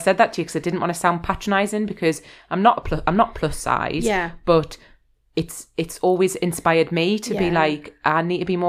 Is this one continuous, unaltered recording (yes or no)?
yes